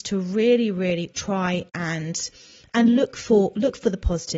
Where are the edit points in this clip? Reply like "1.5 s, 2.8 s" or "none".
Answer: 1.1 s